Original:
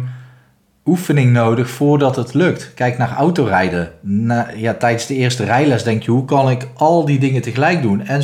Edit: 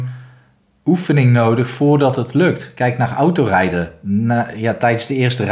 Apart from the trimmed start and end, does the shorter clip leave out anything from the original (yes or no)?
no